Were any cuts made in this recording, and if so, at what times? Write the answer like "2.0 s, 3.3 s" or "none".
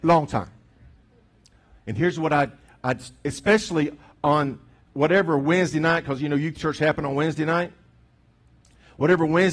none